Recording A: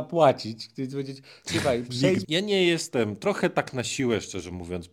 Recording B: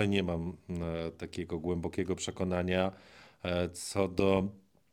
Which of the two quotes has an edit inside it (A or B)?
A